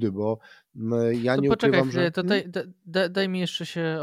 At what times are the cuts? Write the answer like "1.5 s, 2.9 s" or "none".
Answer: none